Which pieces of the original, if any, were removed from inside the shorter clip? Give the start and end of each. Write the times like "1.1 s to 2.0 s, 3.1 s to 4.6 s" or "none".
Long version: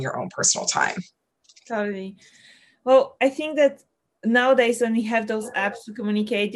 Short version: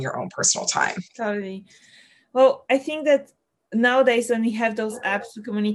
1.1 s to 1.6 s